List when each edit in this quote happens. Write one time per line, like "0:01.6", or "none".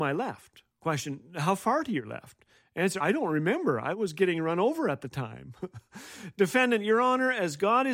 0:03.0